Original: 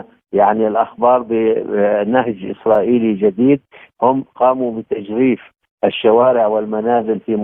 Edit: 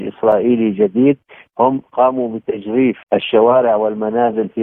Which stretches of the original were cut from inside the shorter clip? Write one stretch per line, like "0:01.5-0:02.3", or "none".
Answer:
0:05.5-0:05.7